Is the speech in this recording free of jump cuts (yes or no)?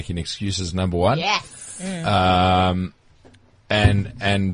yes